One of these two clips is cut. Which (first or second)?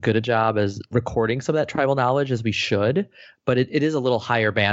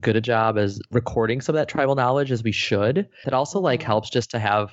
second